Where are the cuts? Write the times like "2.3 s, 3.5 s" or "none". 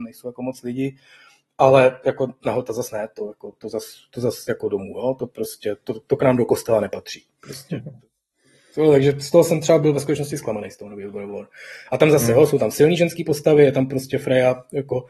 none